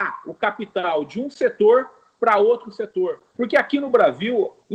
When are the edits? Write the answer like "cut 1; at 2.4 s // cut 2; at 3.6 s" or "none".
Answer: cut 1; at 3.3 s